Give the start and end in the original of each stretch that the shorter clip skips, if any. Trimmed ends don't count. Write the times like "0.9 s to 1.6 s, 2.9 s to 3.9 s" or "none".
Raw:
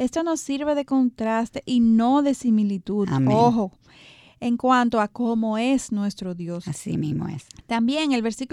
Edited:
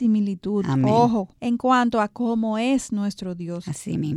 3.8 s to 4.3 s

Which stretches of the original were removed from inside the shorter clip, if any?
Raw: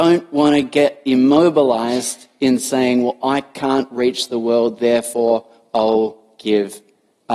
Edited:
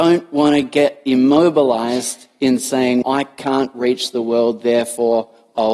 3.0 s to 3.2 s

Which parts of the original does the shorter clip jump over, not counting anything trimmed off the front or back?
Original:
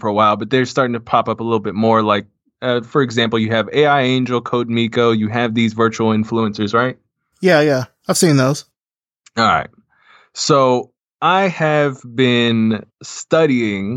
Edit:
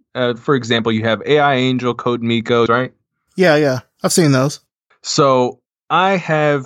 5.1 s to 6.7 s, 9.0 s to 10.2 s

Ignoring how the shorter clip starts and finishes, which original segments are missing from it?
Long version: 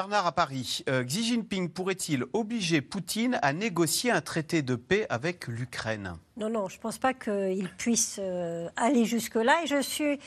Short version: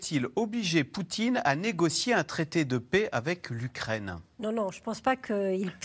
none

